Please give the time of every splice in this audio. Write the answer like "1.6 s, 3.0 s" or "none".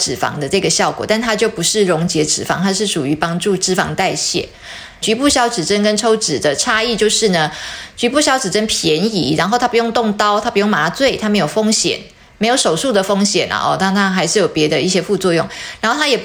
5.0 s